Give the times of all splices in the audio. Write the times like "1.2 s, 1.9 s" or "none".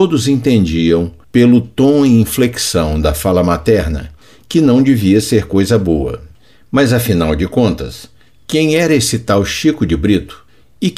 none